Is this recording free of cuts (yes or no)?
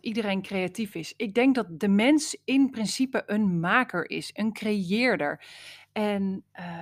yes